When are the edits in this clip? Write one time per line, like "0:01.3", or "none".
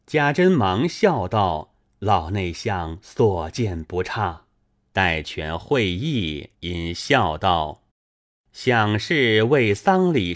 0:04.9
0:06.5
0:07.9